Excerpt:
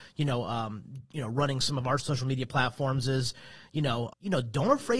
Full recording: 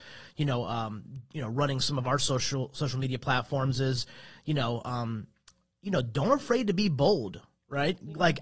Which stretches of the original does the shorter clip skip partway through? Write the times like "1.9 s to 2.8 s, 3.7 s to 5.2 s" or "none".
2.2 s to 2.7 s, 4.8 s to 5.7 s